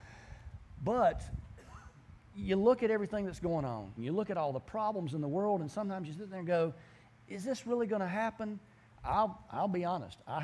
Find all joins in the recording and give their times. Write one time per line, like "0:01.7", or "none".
0:04.0
0:08.9